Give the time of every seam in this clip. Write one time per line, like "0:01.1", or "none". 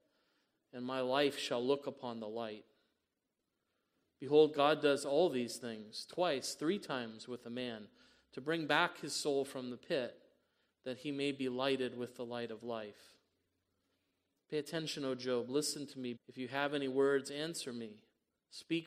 0:16.2